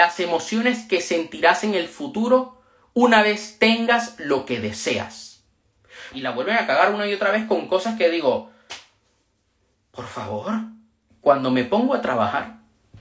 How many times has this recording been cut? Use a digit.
2